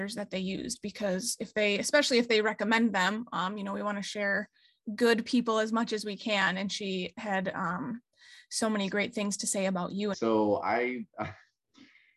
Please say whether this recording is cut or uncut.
cut